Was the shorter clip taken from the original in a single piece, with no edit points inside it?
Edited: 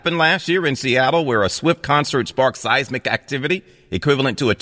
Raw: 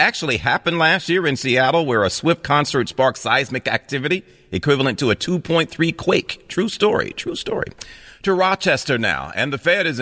yes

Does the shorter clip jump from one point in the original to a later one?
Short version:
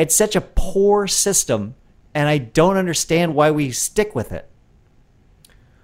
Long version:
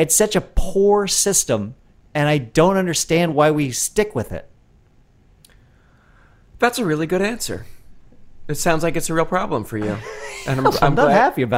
no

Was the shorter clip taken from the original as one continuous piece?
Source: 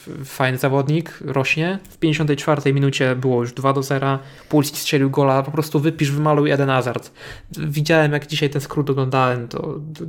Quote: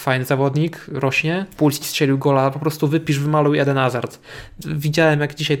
no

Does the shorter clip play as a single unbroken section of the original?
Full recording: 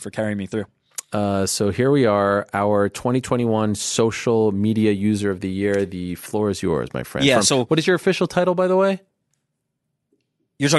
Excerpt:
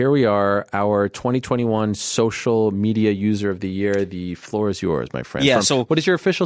yes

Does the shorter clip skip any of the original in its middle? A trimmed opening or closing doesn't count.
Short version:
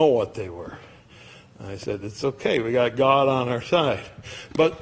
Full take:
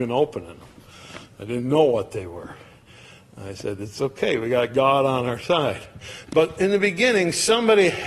no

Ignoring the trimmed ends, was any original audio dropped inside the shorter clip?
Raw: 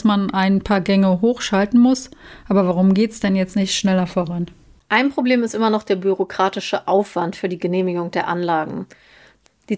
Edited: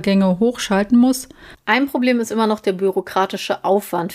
yes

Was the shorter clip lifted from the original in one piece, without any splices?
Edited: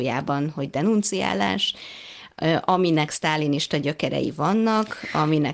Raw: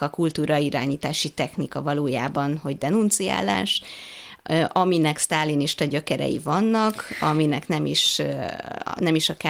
yes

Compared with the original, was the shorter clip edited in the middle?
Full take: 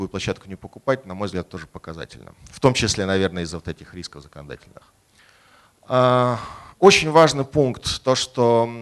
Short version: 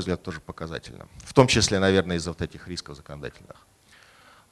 no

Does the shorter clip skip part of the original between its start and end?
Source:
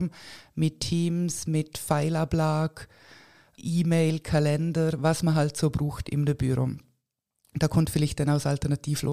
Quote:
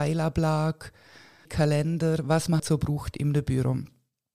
yes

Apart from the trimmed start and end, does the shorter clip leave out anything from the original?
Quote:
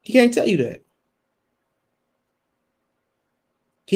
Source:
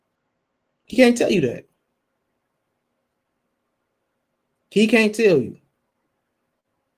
no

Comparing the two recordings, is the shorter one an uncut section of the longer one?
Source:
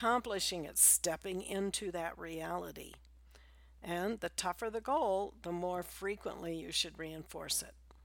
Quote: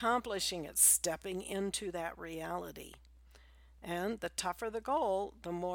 yes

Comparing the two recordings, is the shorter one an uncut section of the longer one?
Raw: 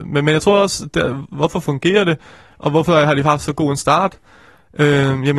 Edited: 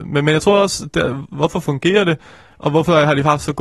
yes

